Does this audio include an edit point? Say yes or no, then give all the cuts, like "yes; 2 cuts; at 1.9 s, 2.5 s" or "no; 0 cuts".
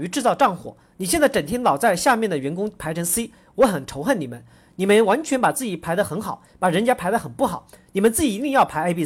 no; 0 cuts